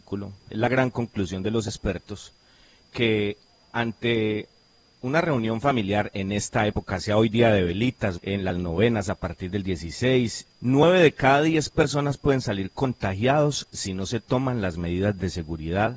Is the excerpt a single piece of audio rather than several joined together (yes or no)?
no